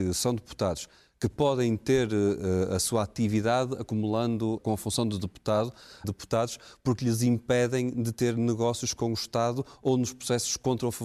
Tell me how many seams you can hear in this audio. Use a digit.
2